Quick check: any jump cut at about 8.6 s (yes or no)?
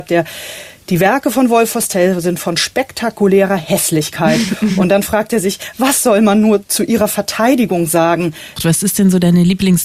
yes